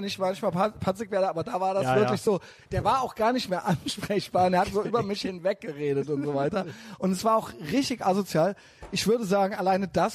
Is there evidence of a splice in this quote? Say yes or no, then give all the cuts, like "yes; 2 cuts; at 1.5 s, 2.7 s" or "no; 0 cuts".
no; 0 cuts